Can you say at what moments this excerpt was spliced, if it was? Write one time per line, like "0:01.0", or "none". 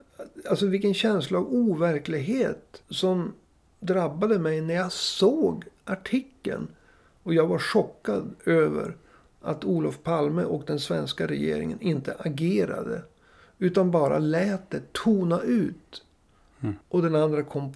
0:16.8

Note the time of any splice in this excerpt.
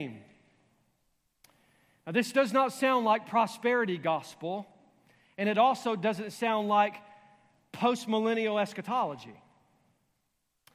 none

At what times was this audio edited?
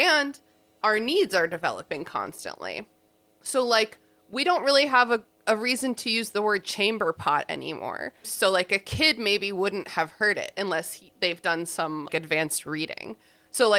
0:08.2
0:12.1

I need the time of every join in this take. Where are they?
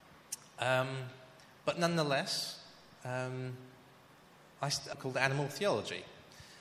0:04.9

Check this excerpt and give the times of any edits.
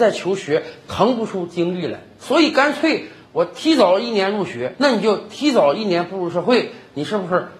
0:04.7

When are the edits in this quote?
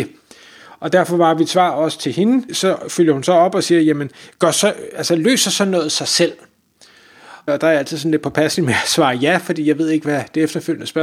0:02.5
0:07.5

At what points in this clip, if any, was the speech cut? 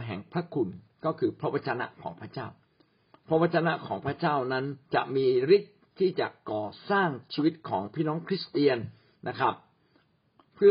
0:04.8

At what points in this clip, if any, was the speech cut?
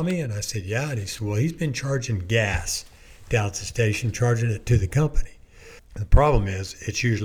0:05.8

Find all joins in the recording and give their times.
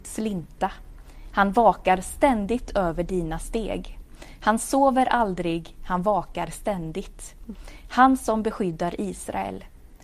none

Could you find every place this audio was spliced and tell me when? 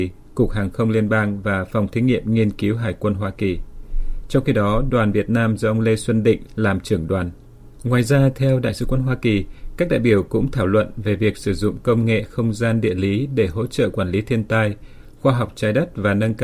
0:06.5
0:07.8

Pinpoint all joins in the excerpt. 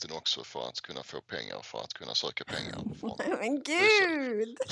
none

